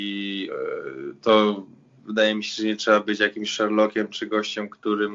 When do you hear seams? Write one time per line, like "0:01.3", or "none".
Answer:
none

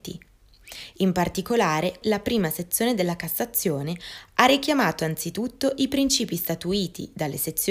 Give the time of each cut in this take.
0:02.0

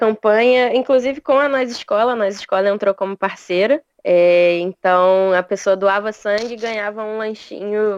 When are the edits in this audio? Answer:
0:03.9

